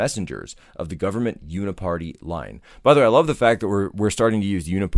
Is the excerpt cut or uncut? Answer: uncut